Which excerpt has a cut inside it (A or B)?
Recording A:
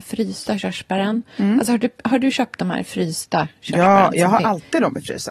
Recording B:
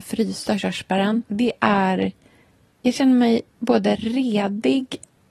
B